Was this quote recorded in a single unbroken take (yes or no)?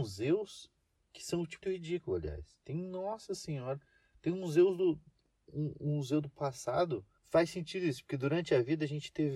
no